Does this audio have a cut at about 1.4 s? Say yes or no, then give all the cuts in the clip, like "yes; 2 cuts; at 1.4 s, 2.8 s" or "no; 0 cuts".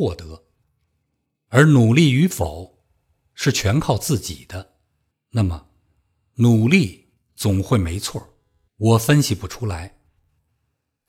no; 2 cuts; at 5.1 s, 8.7 s